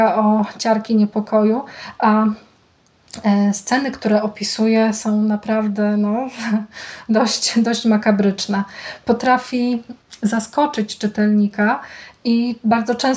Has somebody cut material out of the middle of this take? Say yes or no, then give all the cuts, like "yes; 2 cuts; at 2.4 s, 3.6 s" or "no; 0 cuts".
no; 0 cuts